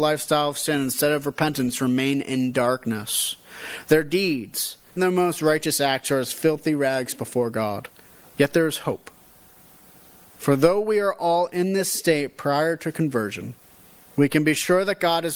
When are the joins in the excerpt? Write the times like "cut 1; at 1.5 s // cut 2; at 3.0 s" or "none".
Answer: cut 1; at 5.0 s // cut 2; at 8.2 s